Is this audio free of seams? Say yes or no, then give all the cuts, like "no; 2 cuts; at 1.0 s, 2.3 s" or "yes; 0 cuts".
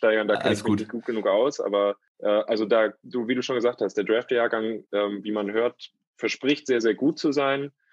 yes; 0 cuts